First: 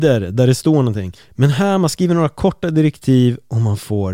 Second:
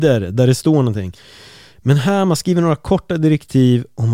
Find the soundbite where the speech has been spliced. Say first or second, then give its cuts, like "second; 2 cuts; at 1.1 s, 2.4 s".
first; 1 cut; at 1.2 s